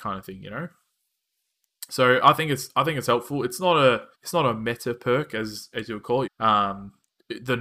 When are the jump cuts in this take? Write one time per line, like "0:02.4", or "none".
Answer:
0:04.1
0:06.3